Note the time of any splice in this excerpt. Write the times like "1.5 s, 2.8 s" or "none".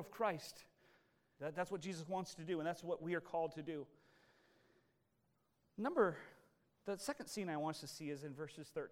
1.4 s